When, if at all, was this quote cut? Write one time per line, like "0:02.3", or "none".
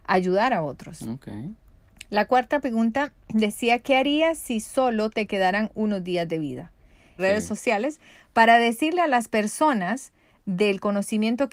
0:07.2